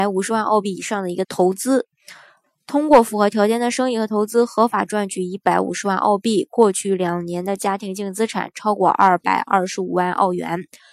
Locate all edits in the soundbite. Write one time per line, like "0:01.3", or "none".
0:01.2